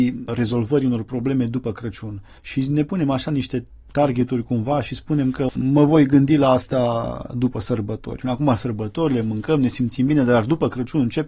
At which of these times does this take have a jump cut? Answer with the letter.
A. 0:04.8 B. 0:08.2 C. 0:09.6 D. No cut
B